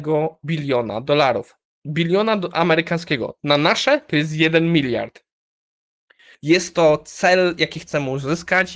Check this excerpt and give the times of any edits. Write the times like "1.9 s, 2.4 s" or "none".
6.3 s